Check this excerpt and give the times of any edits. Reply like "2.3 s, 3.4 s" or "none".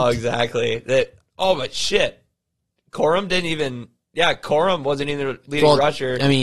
1.2 s